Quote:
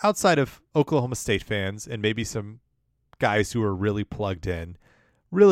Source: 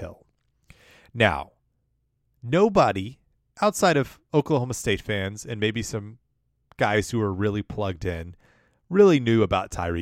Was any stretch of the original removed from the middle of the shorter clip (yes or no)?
no